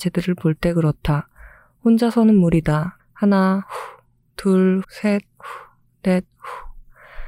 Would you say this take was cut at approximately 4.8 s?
yes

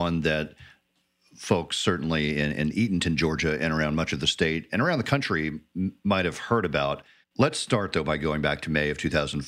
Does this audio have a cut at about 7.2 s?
yes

